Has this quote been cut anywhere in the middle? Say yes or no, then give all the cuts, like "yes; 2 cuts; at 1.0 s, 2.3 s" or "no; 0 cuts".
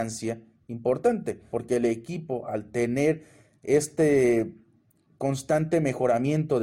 yes; 1 cut; at 1.5 s